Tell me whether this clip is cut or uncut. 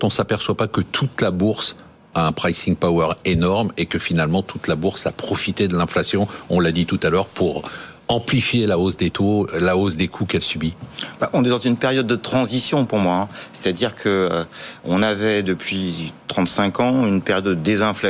uncut